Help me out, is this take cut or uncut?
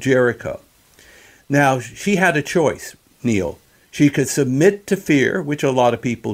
uncut